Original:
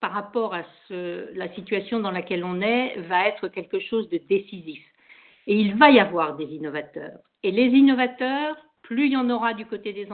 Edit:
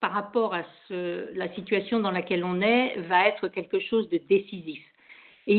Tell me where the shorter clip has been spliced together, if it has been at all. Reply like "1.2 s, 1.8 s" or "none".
none